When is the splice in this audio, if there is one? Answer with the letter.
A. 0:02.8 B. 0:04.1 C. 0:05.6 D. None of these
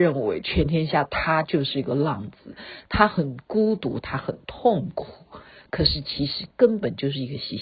D